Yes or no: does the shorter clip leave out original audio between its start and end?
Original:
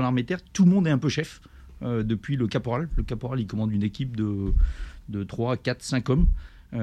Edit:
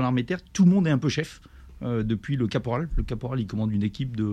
no